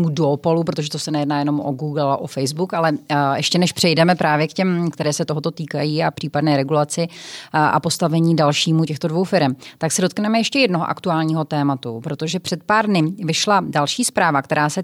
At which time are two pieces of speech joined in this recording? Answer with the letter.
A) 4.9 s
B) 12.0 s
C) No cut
A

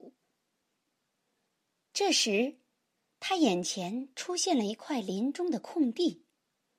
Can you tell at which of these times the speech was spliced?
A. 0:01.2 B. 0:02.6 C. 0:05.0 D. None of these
D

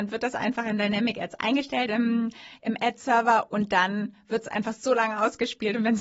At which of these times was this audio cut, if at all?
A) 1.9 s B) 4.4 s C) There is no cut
C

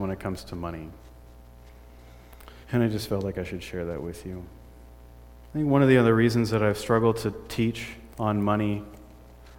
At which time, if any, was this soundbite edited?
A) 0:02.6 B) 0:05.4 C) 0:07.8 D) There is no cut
A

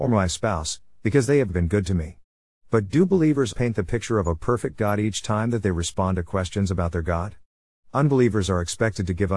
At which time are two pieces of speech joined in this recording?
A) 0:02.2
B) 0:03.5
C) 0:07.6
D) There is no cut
B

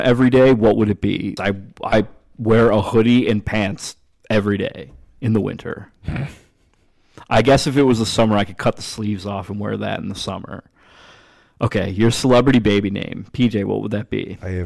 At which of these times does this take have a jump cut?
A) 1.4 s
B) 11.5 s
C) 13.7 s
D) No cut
A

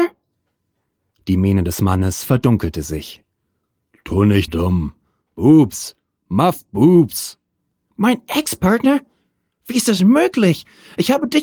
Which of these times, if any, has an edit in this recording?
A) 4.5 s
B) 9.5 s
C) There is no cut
A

